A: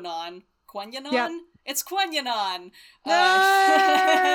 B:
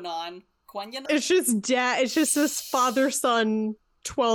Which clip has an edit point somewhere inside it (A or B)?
B